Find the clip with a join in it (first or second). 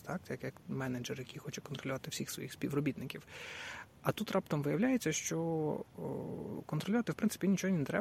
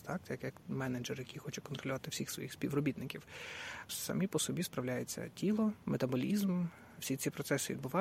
second